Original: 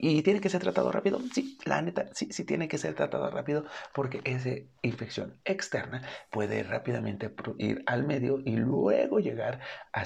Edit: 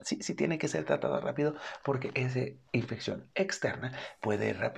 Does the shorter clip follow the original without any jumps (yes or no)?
yes